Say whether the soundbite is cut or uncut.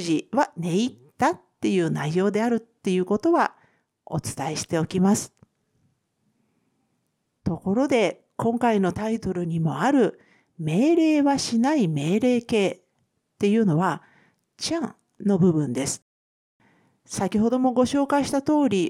uncut